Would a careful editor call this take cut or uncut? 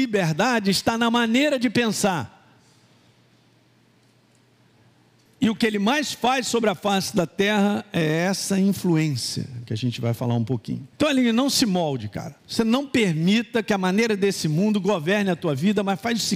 cut